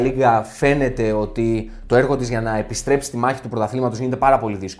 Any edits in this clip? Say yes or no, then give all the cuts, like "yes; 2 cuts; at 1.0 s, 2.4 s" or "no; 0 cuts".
no; 0 cuts